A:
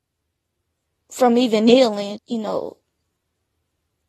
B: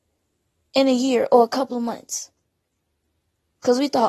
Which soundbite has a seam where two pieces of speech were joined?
A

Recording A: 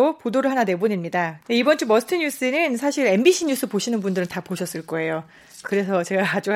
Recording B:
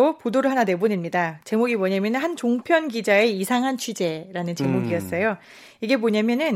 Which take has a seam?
A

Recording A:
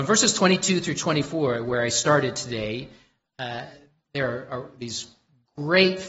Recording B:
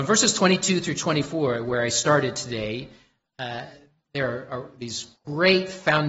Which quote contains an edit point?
B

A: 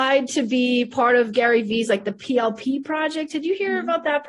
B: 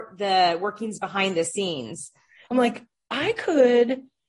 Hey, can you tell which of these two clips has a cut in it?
B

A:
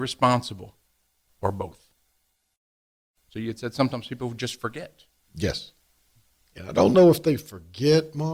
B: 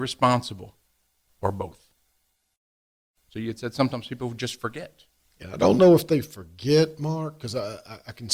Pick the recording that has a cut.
B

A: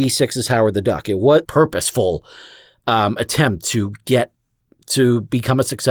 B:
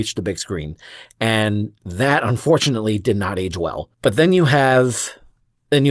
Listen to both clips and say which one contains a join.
A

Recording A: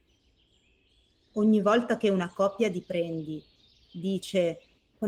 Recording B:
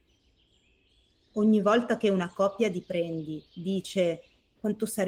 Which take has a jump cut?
B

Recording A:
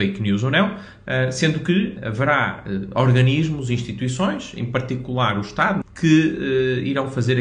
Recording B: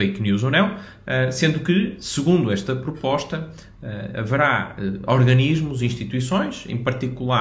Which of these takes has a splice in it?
A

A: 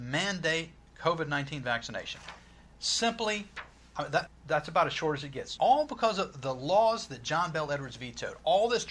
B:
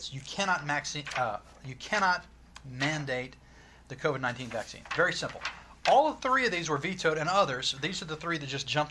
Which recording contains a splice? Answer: A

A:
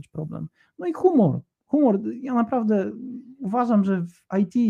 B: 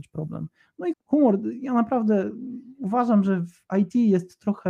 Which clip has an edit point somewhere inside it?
B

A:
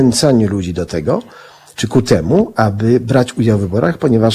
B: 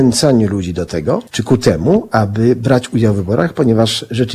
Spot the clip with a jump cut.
B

